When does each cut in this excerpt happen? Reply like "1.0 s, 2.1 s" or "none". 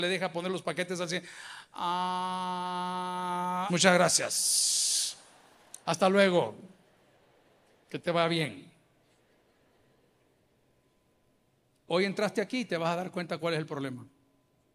3.7 s